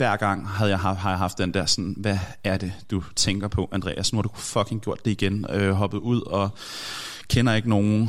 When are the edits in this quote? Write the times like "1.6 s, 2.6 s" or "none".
none